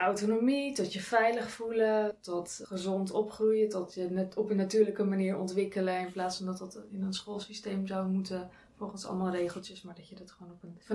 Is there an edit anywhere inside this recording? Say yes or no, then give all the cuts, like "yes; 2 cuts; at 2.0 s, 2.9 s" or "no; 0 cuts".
no; 0 cuts